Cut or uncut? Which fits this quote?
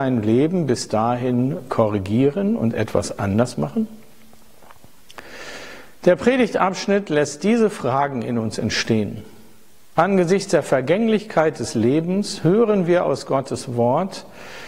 uncut